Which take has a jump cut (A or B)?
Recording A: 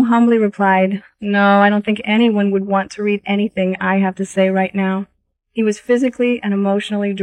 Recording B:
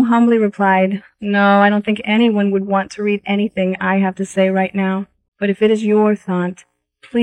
B